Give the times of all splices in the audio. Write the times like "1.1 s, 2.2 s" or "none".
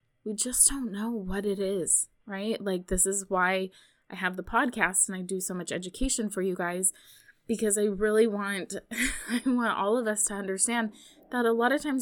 none